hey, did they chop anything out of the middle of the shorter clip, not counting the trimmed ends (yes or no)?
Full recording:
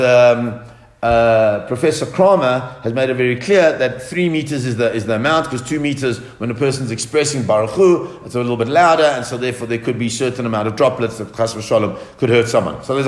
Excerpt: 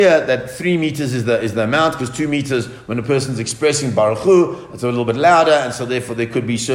no